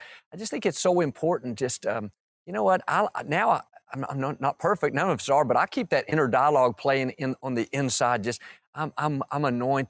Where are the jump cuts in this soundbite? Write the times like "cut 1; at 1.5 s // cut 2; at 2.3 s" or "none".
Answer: none